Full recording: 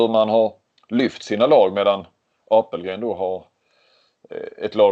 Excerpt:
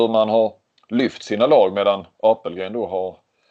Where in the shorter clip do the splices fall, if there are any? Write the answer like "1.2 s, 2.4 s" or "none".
2.1 s